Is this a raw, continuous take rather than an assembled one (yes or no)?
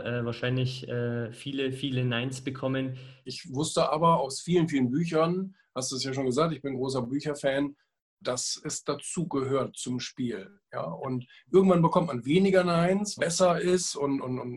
no